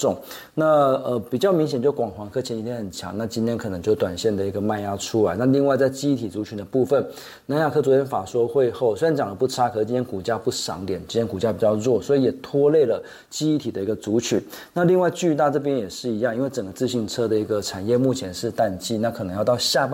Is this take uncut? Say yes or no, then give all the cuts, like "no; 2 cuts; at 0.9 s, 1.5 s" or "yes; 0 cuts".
yes; 0 cuts